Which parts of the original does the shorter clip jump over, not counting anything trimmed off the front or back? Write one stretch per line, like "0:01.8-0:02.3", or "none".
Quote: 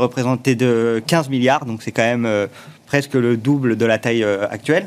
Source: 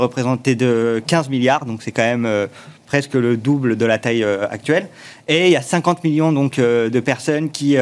none